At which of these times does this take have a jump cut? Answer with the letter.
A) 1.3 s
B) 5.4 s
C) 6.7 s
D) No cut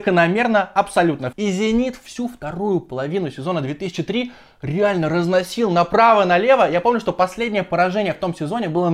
A